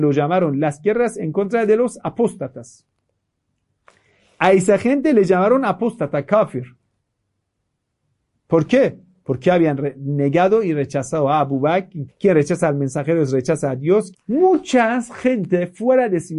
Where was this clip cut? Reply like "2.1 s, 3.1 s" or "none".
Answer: 12.1 s, 14.1 s